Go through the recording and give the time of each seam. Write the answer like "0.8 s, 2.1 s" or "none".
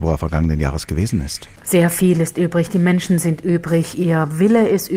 1.6 s